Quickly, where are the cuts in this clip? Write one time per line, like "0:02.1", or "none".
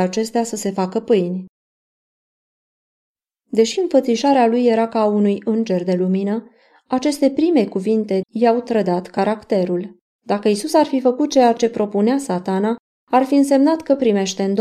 0:08.2
0:10.2